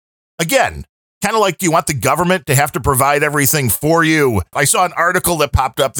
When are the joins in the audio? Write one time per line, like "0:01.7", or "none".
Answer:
0:04.5